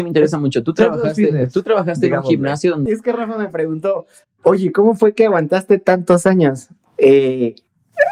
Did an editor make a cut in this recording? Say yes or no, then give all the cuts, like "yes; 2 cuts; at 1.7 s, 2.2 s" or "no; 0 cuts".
yes; 1 cut; at 2.9 s